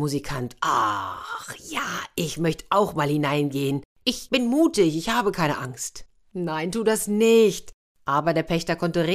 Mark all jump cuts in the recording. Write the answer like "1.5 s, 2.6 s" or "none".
none